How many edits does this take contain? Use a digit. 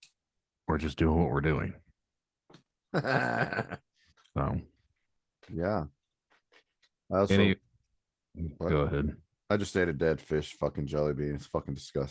1